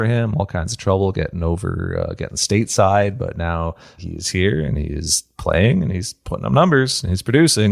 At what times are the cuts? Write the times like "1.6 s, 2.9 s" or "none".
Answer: none